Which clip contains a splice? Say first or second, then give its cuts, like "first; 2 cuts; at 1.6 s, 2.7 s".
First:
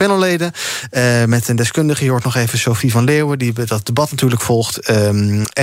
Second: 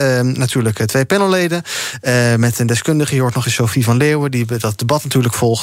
second; 1 cut; at 3.4 s